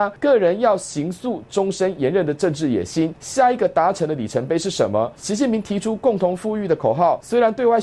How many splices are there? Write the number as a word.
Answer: one